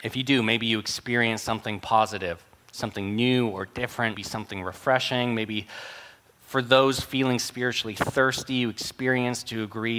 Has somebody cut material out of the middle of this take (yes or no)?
yes